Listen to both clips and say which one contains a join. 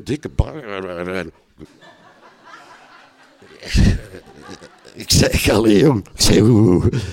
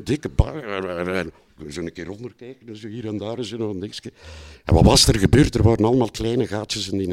first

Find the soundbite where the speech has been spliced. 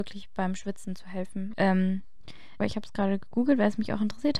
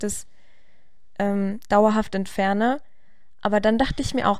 first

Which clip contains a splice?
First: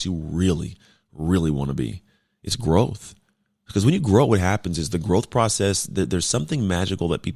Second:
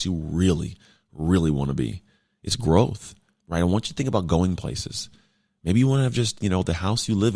second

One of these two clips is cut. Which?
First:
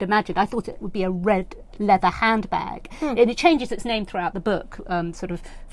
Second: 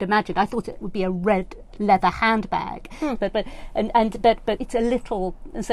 second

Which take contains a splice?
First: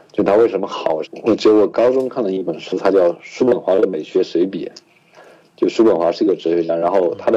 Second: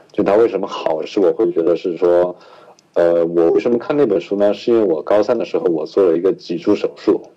first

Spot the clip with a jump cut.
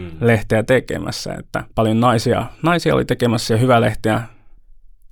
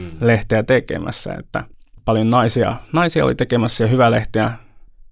first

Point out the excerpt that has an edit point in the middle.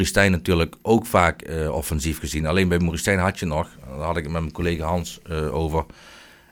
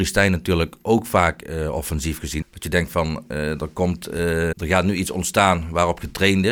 second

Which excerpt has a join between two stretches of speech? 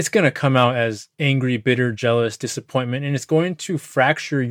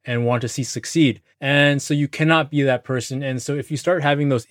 second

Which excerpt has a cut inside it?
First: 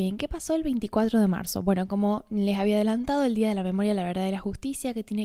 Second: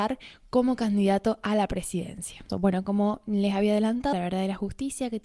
second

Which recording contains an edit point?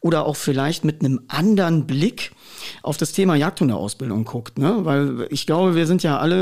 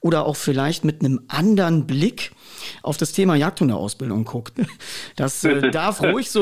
second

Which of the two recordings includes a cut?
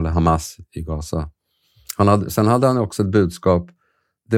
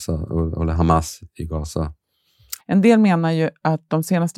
second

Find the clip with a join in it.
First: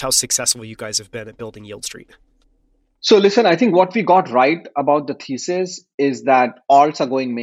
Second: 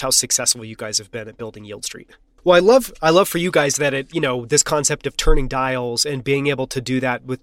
second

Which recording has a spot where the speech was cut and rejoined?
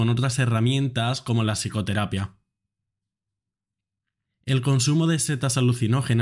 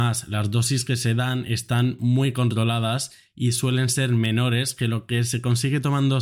first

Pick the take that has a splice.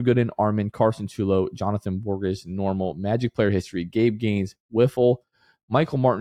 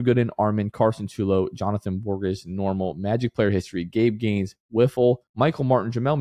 second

